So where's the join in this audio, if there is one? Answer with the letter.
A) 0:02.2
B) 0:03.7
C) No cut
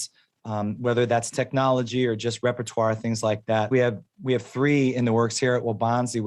B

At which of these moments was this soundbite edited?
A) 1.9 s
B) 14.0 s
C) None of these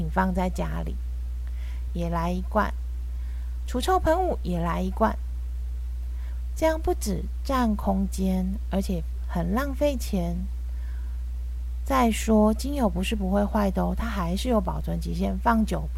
A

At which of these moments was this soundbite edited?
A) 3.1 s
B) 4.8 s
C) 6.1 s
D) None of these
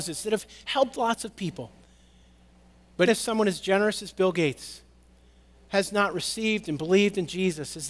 A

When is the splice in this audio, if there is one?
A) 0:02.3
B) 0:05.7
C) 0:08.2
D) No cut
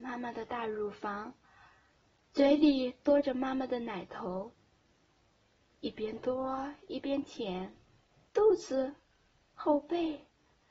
C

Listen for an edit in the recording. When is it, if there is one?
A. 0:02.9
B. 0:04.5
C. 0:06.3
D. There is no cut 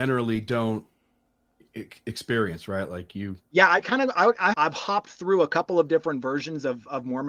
B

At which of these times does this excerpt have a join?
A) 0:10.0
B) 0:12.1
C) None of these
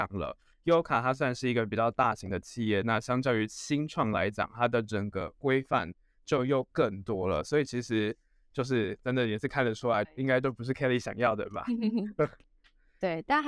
A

